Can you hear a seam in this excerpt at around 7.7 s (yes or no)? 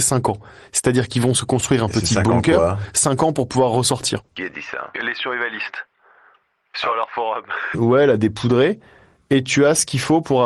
yes